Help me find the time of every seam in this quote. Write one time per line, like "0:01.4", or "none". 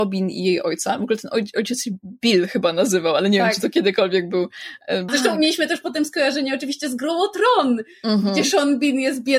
0:05.1